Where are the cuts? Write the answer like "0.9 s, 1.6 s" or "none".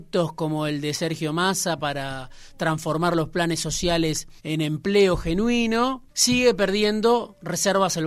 4.4 s, 6.1 s